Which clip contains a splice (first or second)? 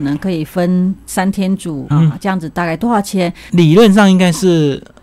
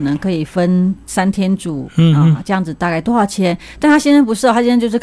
first